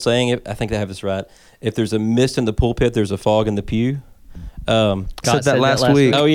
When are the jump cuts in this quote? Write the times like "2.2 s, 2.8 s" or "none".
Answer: 5.2 s